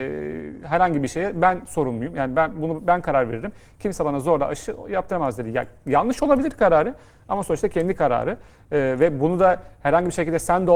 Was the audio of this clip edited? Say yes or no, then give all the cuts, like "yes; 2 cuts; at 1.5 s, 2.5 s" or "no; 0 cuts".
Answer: no; 0 cuts